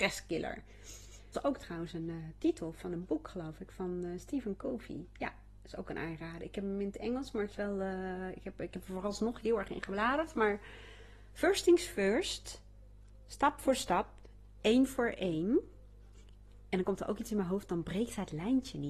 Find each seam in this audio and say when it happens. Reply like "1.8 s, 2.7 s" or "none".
1.3 s